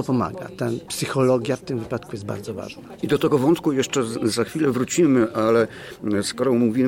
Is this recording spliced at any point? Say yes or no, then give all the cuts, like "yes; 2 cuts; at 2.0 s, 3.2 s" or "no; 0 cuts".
no; 0 cuts